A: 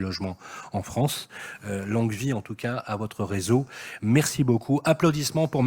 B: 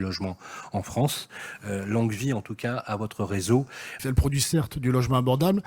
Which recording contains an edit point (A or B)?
B